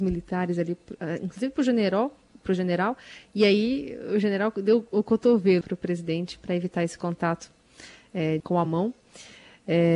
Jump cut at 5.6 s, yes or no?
yes